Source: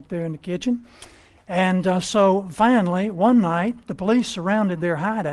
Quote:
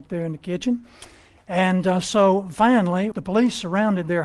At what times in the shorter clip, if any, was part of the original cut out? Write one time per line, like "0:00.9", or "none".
0:03.1

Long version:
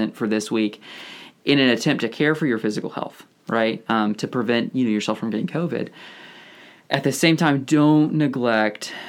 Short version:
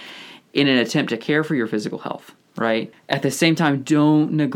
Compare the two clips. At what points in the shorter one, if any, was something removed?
0:02.9

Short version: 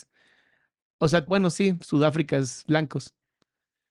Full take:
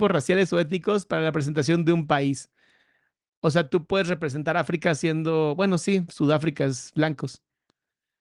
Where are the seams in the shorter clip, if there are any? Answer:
0:01.3

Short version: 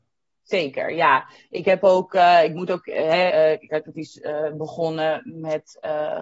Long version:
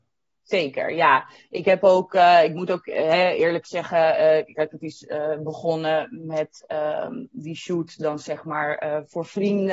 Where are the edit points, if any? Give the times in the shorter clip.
0:03.3

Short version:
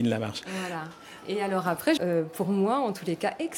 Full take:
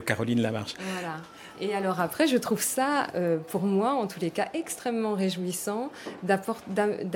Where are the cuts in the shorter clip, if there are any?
0:02.0

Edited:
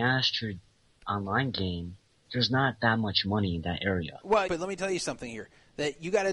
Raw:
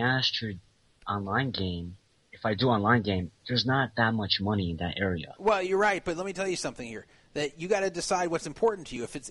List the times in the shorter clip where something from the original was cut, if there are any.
0:02.2
0:04.5

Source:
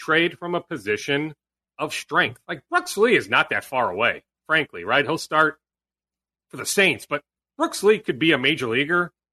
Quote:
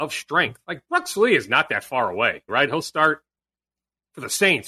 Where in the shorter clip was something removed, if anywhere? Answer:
0:02.5

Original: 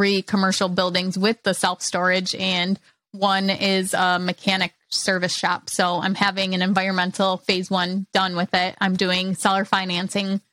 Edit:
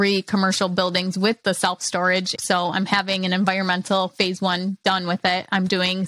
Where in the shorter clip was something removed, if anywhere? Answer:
0:02.4

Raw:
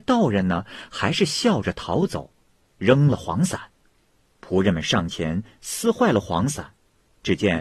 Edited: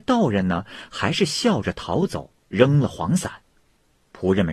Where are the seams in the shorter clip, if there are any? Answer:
0:02.4

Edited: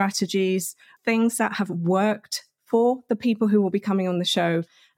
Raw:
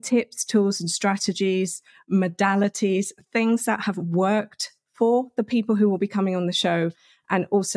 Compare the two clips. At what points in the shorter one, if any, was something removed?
0:01.0

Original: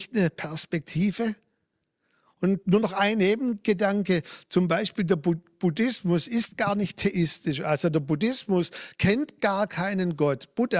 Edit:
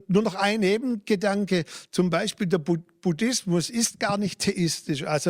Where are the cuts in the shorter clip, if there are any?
none

